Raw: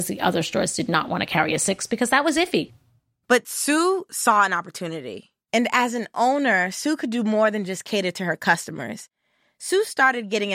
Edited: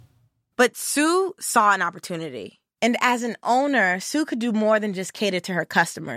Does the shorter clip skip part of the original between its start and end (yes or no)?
no